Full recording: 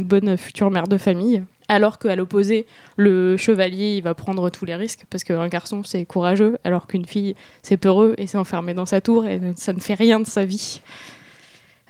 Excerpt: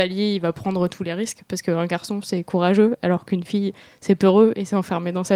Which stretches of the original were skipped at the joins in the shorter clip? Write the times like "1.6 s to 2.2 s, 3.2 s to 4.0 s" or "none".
none